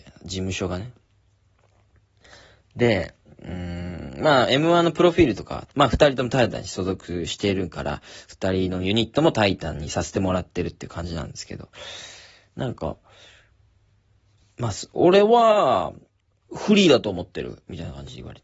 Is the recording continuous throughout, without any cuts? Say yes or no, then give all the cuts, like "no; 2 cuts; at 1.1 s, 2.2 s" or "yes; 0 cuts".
no; 1 cut; at 5.7 s